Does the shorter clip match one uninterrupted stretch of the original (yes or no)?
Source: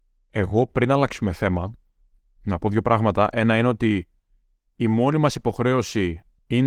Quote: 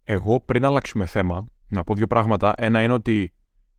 no